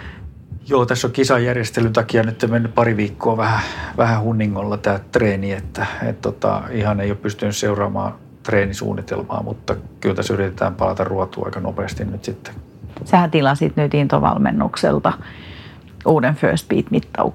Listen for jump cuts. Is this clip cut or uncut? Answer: uncut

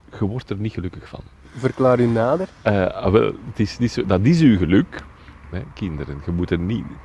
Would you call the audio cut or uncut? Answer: cut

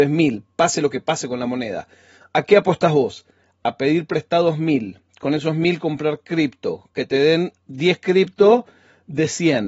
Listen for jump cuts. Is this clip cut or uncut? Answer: uncut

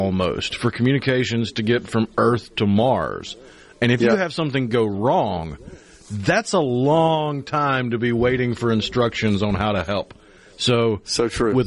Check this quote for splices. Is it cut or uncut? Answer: uncut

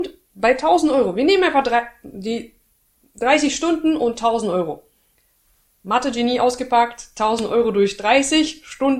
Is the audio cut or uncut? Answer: uncut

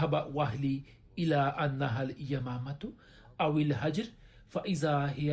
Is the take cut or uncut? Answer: uncut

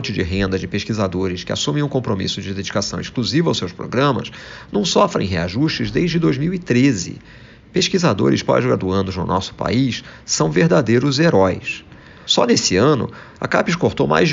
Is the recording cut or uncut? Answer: cut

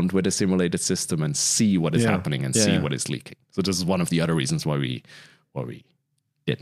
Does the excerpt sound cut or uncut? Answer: uncut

